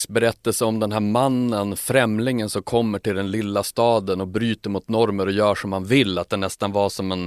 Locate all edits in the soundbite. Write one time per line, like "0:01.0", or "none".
none